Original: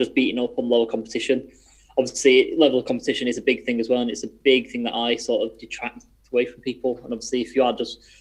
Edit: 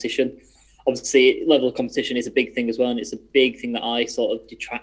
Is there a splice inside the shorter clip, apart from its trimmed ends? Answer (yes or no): no